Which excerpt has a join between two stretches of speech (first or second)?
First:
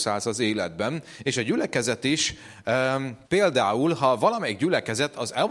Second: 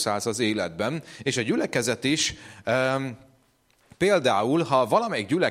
first